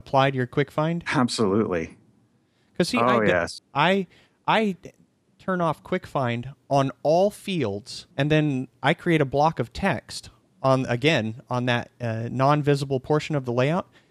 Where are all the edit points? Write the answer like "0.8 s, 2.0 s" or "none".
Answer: 3.6 s, 8.1 s